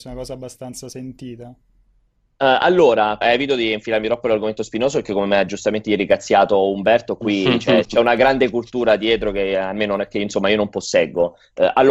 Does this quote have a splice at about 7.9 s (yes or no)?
yes